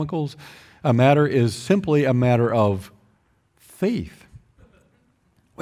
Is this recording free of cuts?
yes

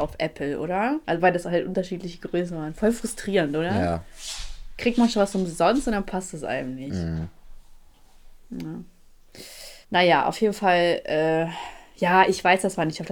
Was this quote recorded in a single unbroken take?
no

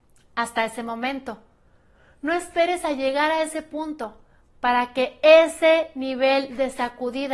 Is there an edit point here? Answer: no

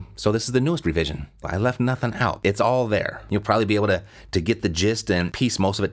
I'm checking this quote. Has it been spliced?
yes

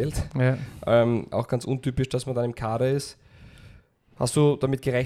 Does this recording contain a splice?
no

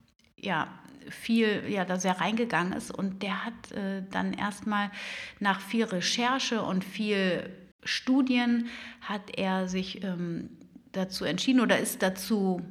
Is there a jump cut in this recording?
yes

